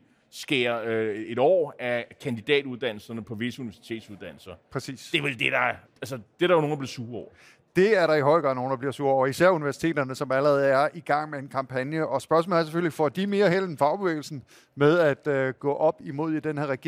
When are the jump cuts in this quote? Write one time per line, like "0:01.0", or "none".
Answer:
0:05.8